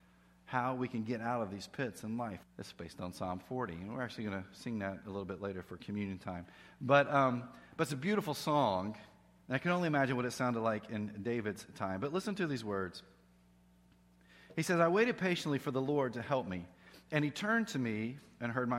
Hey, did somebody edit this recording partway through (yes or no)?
yes